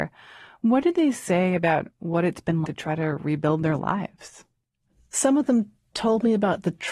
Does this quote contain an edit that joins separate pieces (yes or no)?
yes